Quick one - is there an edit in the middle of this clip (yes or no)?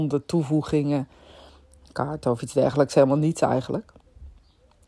no